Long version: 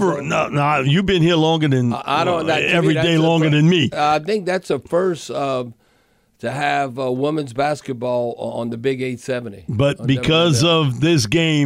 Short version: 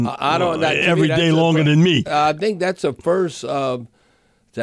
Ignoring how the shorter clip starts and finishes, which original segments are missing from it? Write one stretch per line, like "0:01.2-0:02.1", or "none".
none

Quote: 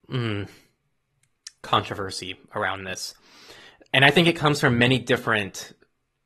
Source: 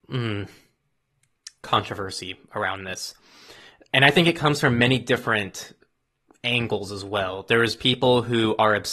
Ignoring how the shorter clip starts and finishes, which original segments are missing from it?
none

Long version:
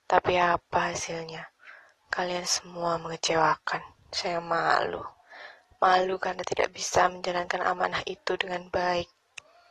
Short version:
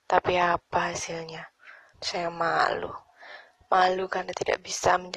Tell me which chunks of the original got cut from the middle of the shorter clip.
0:01.9-0:04.0

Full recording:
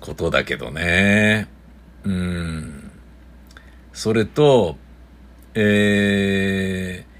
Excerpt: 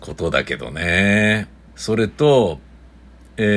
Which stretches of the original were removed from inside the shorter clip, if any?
0:01.7-0:03.9

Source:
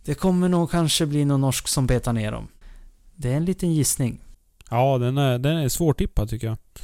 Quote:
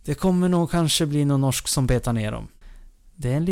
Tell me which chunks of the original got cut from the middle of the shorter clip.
none

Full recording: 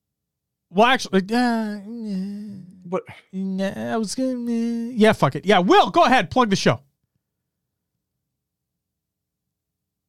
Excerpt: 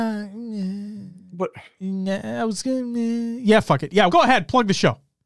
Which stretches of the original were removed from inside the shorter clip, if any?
0:05.6-0:05.9

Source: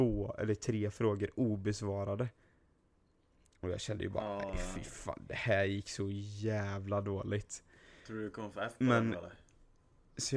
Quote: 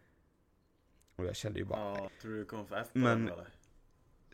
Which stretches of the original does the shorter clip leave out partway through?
0:04.5-0:07.9

